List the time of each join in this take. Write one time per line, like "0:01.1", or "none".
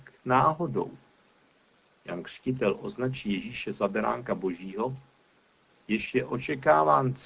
0:05.7